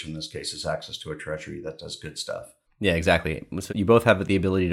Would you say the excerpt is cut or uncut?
uncut